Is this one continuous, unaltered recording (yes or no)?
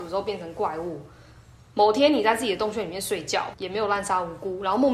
no